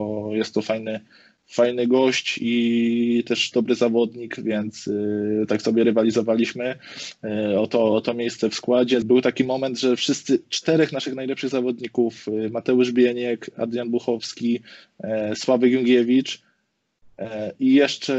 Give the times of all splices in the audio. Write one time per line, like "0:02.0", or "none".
0:09.0